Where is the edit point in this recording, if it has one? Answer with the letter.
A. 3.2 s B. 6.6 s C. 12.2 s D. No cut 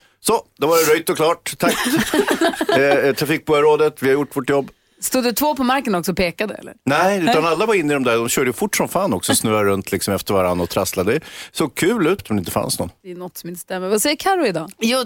C